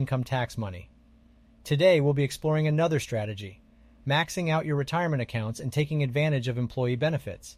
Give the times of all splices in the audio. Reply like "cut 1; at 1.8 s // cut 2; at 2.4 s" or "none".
none